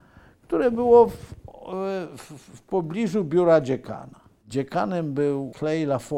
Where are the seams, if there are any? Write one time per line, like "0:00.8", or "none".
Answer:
none